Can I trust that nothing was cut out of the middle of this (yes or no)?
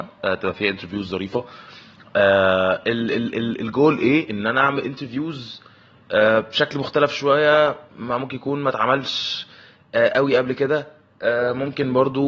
yes